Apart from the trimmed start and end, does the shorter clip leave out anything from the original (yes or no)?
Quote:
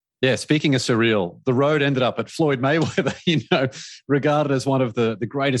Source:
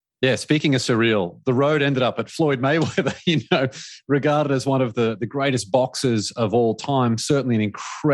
no